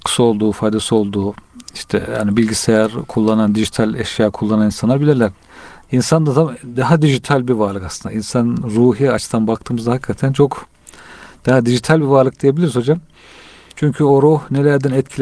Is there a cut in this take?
yes; 1 cut; at 5.8 s

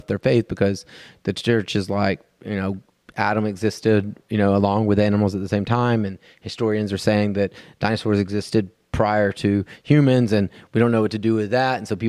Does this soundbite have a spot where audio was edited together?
no; 0 cuts

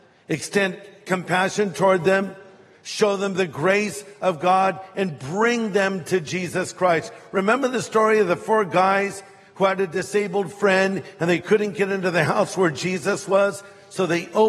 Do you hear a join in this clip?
no; 0 cuts

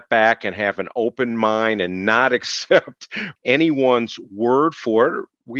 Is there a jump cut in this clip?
yes; 1 cut; at 3.4 s

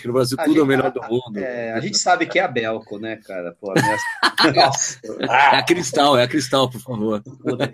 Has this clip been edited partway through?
no; 0 cuts

